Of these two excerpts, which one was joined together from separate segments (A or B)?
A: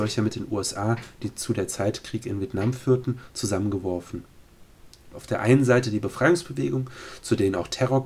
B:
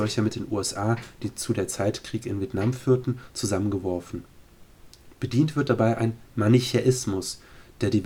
A